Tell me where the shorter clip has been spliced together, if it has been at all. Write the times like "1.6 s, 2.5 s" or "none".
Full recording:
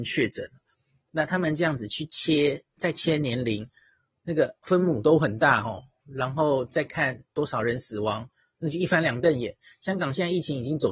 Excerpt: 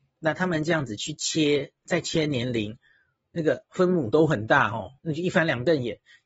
5.0 s